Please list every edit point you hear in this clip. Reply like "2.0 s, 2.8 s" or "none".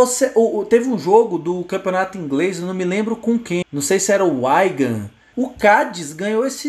3.6 s, 5.3 s

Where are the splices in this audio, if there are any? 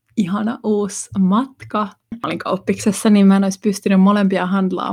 2.1 s

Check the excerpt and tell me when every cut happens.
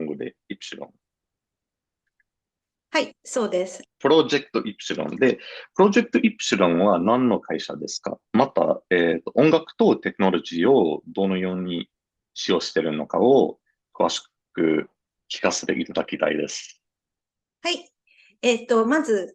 3.8 s

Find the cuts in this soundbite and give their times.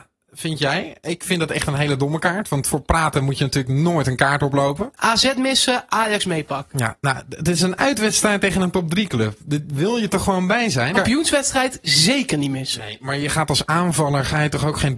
5.0 s, 10.9 s

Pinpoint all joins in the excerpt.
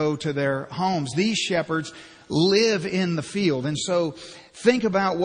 none

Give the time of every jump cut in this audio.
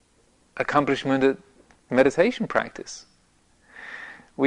3.5 s

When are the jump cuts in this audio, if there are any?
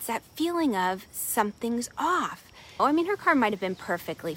2.8 s

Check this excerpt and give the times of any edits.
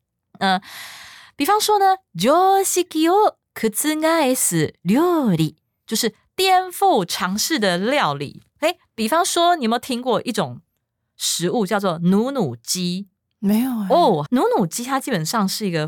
14.3 s

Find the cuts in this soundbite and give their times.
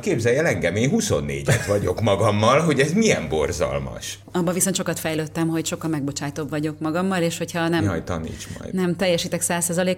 none

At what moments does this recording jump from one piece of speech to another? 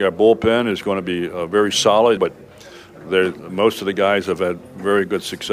2.2 s

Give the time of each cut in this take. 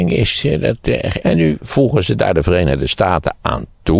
1.2 s

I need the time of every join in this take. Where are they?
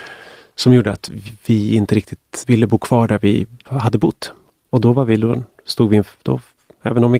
2.4 s, 4.5 s

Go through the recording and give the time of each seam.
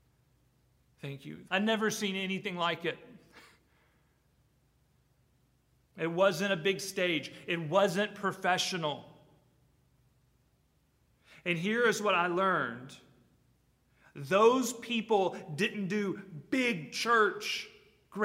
1.5 s

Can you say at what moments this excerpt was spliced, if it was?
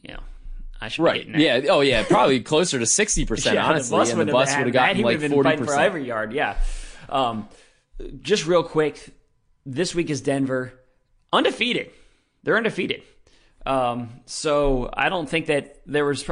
none

